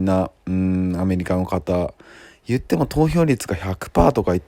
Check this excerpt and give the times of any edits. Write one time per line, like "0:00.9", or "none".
none